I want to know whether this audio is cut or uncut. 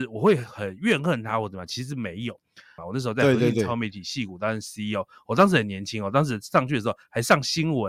cut